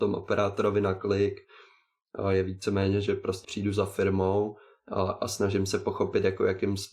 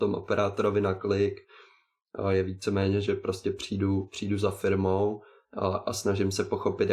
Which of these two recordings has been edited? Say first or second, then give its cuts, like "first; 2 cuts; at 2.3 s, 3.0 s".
first; 1 cut; at 3.4 s